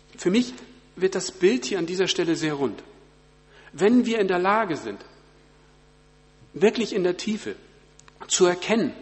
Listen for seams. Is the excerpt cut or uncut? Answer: uncut